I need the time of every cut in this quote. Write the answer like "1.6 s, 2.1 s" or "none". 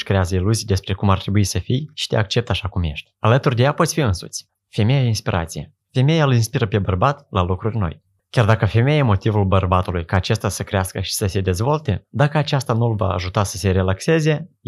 4.5 s, 8.2 s